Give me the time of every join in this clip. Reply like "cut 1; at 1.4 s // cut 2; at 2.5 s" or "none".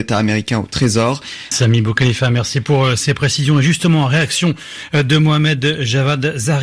cut 1; at 1.5 s